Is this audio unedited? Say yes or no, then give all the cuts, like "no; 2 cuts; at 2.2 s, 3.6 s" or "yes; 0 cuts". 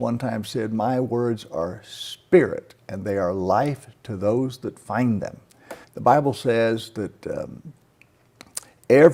no; 1 cut; at 5.8 s